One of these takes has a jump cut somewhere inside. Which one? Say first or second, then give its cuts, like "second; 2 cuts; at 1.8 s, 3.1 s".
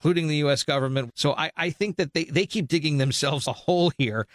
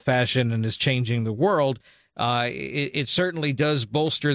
first; 2 cuts; at 1.1 s, 3.4 s